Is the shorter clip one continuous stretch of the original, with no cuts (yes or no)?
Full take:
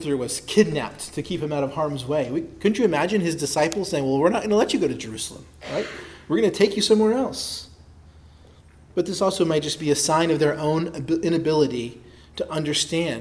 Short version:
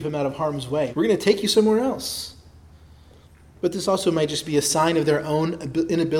no